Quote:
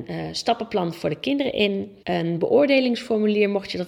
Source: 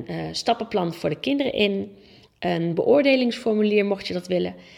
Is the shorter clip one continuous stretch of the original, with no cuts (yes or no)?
no